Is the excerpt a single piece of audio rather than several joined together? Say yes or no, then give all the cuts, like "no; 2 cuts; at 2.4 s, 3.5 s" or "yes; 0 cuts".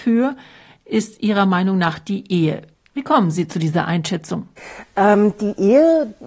yes; 0 cuts